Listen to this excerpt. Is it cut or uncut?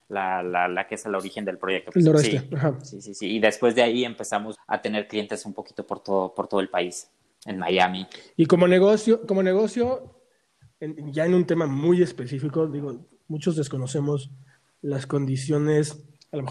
cut